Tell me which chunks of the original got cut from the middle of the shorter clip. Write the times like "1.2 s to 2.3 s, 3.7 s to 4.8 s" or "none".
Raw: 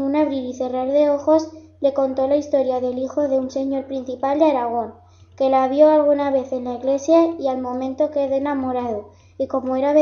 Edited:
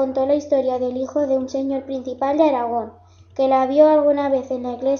none